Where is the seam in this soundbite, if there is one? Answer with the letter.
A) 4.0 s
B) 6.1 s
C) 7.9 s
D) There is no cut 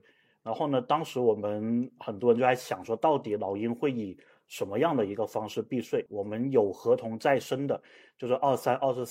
B